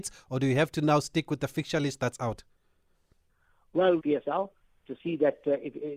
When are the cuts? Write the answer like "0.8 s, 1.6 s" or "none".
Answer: 4.0 s